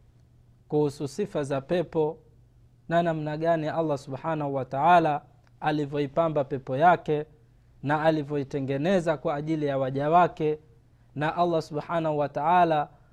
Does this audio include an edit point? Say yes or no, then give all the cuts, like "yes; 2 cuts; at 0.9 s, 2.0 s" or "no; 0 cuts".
no; 0 cuts